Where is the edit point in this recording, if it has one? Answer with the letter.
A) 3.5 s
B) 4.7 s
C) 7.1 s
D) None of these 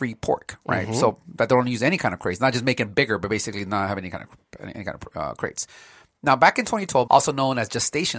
C